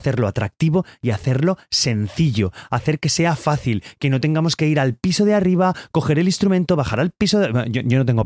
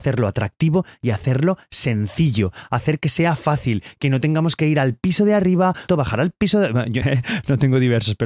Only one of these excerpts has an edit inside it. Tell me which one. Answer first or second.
second